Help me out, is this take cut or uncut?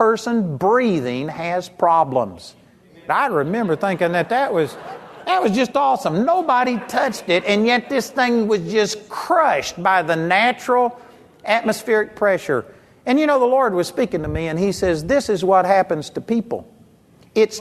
cut